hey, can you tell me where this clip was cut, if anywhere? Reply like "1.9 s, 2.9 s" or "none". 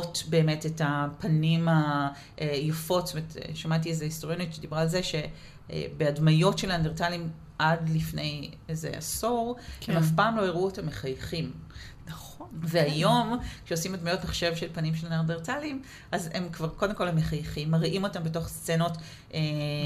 none